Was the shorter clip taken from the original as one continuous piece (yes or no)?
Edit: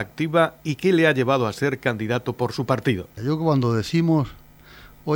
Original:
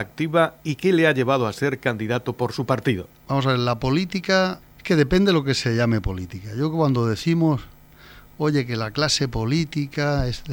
no